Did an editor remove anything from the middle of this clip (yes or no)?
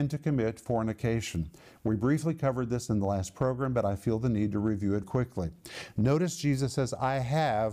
yes